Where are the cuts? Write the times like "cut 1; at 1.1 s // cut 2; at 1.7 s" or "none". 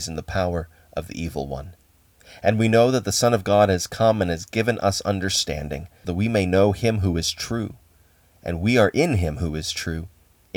cut 1; at 6.0 s